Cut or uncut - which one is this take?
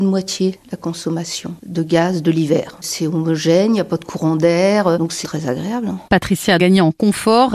cut